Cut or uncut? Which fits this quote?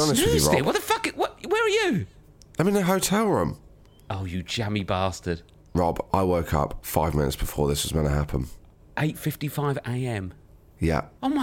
uncut